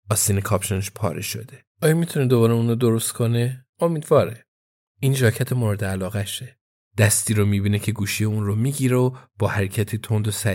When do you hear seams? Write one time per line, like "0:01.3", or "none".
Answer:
0:06.8